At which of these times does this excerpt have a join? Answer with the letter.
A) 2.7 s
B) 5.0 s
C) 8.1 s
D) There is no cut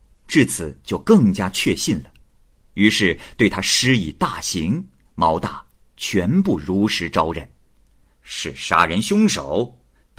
C